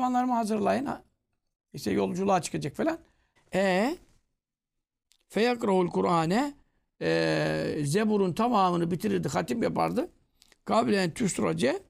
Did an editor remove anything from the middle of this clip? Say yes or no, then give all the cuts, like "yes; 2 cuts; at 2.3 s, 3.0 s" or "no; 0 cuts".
yes; 1 cut; at 3.4 s